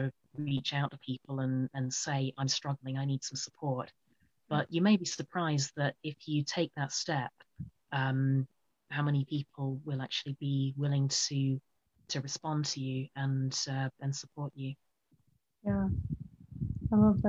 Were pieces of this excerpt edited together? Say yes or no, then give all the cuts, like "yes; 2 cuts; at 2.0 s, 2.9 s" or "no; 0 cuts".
no; 0 cuts